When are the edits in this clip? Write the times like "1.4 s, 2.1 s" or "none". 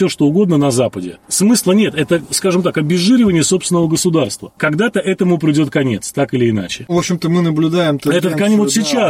none